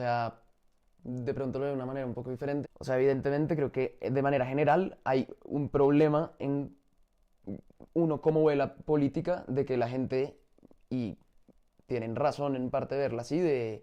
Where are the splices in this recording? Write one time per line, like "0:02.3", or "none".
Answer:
0:02.6